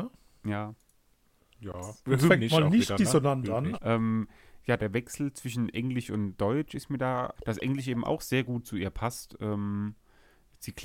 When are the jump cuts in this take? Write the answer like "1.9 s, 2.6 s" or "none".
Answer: 3.7 s, 4.8 s, 7.4 s